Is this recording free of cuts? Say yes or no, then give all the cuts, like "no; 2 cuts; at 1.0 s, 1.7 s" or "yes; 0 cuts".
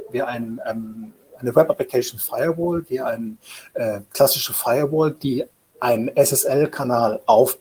yes; 0 cuts